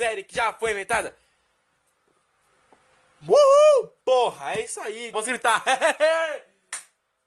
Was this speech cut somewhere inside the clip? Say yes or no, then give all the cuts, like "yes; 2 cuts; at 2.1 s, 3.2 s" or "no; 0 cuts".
yes; 1 cut; at 5.1 s